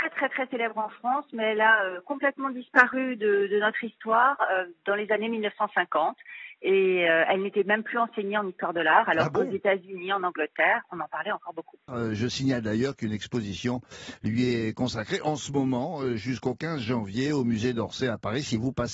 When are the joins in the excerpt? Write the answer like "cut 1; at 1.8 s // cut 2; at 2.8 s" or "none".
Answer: cut 1; at 11.9 s